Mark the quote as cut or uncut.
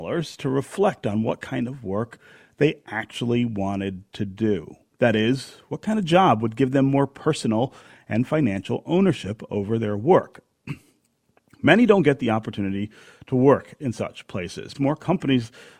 cut